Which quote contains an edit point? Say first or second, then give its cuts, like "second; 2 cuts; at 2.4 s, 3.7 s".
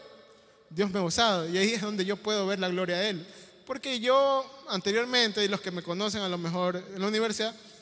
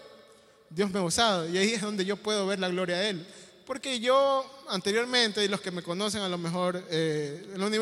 first; 1 cut; at 6.9 s